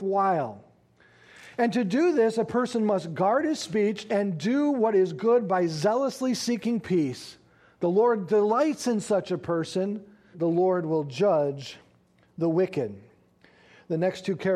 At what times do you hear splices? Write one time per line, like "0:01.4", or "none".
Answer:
0:04.1
0:10.3